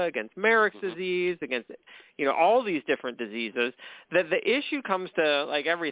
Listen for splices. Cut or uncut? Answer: uncut